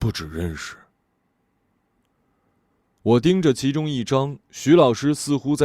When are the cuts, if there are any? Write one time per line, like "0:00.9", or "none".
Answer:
none